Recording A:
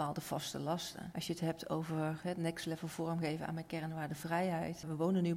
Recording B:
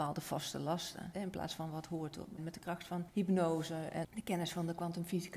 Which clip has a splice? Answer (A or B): B